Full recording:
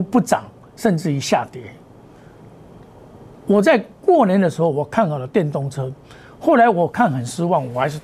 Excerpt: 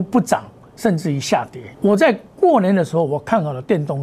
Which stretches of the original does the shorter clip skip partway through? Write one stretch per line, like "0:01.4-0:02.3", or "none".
0:01.7-0:03.4